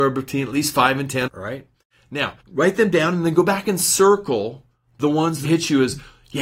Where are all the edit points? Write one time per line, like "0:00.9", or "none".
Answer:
0:01.3
0:02.4
0:05.4